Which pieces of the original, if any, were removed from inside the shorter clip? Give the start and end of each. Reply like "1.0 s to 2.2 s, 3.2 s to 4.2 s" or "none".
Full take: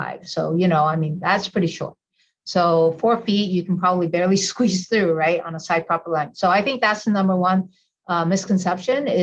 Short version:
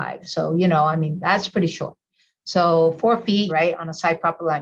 3.5 s to 5.1 s